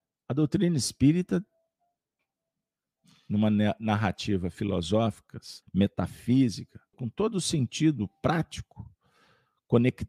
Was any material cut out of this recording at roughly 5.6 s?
yes; 2 cuts; at 5.6 s, 6.9 s

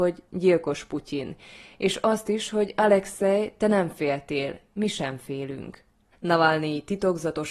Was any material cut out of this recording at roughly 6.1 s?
yes; 1 cut; at 6.1 s

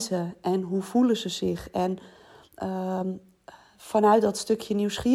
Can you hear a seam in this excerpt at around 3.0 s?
no; 0 cuts

